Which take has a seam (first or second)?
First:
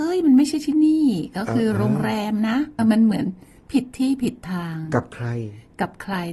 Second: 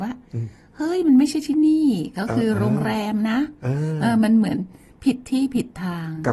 first